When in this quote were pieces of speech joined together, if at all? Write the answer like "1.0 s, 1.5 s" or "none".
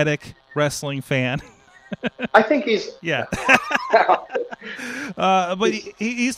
3.0 s

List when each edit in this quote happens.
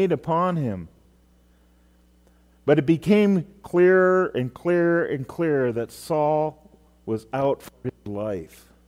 none

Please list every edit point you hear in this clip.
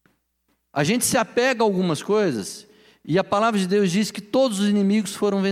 none

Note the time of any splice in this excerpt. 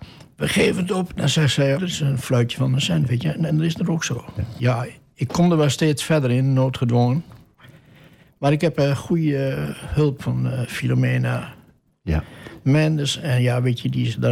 1.8 s, 4.6 s

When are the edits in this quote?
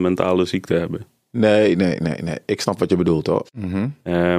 3.4 s

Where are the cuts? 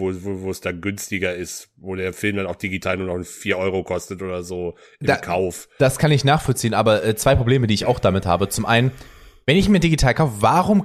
none

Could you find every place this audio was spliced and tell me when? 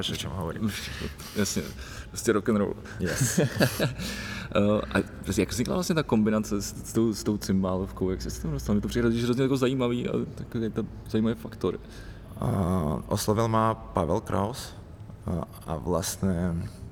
none

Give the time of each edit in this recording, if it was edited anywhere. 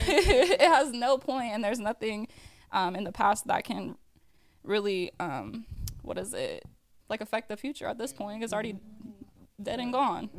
7.0 s

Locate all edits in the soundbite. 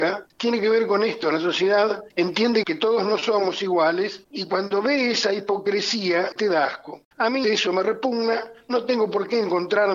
6.3 s, 7.4 s

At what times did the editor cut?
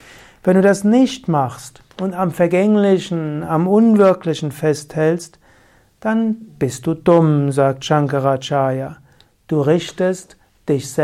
none

